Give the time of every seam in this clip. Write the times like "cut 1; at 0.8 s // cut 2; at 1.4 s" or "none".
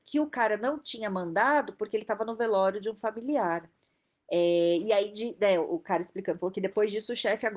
none